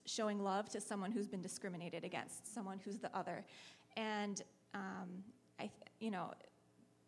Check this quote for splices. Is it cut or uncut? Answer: uncut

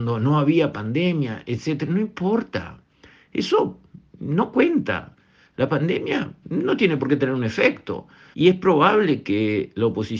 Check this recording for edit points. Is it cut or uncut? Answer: cut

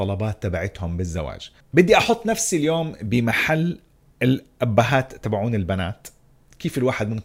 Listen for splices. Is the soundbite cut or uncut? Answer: uncut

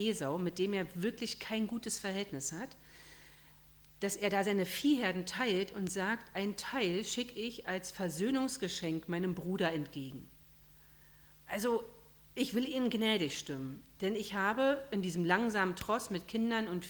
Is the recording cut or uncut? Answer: uncut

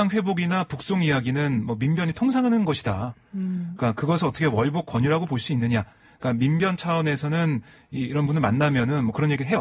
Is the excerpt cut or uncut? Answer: uncut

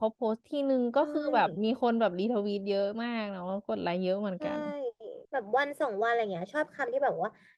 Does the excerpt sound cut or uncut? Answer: cut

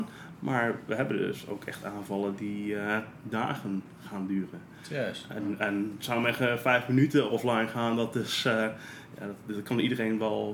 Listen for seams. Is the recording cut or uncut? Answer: uncut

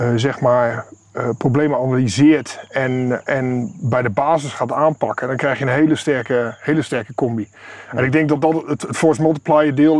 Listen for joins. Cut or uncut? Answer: uncut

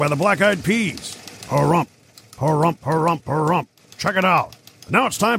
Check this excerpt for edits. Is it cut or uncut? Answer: uncut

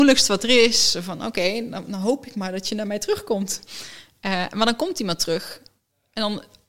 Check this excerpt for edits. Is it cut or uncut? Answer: uncut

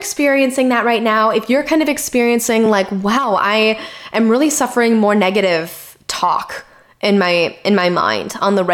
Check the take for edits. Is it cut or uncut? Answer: uncut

